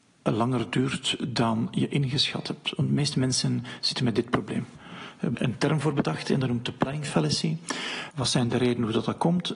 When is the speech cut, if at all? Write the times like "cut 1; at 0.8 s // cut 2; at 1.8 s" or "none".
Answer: cut 1; at 5.3 s // cut 2; at 8.1 s